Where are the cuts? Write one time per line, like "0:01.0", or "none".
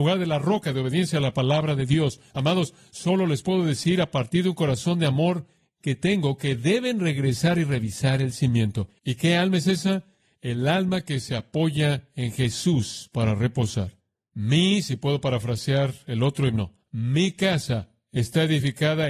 0:09.0